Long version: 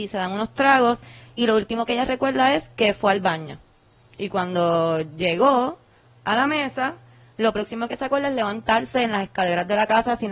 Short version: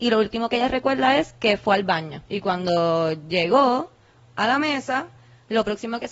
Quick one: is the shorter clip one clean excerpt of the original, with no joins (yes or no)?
no